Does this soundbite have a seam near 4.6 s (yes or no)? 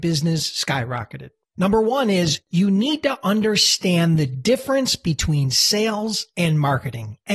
no